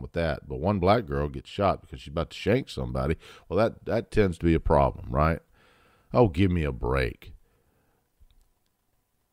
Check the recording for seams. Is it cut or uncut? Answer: uncut